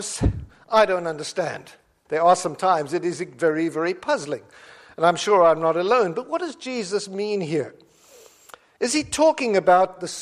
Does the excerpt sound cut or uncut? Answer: cut